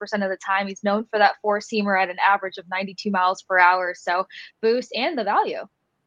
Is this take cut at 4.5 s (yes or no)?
yes